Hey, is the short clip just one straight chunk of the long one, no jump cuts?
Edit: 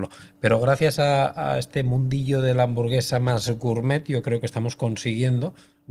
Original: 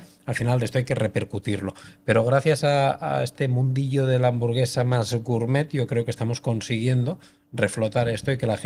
yes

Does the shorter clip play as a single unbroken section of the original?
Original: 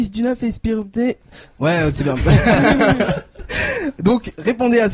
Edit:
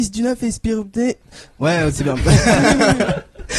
yes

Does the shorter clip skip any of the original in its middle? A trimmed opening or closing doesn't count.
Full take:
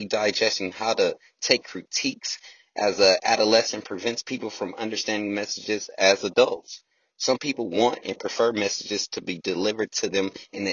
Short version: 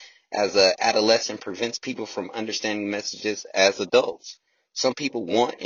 no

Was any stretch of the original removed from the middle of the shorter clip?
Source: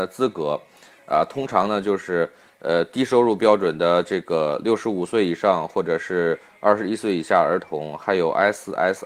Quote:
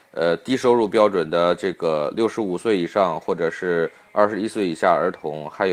no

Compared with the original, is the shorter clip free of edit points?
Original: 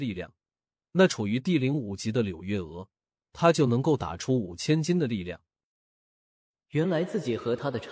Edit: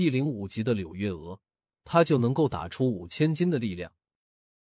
yes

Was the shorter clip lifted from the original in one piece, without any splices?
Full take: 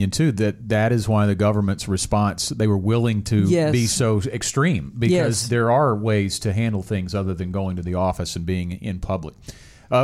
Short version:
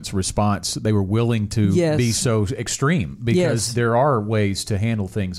yes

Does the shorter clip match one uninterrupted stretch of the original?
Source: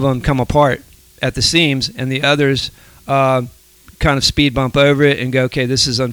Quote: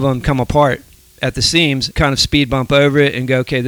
no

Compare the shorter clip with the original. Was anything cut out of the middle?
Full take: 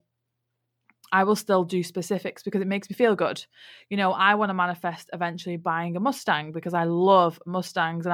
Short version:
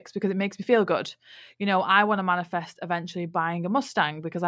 no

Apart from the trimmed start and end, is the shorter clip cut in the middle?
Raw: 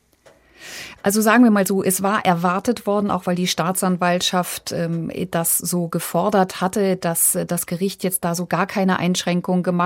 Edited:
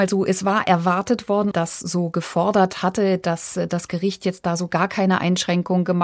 yes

